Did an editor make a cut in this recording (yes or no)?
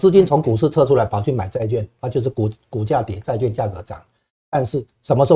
no